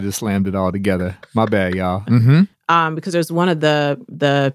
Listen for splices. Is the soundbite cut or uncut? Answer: cut